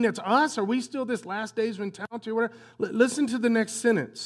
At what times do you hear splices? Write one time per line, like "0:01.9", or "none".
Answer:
none